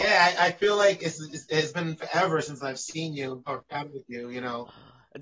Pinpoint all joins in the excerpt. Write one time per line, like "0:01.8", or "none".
0:01.0
0:03.5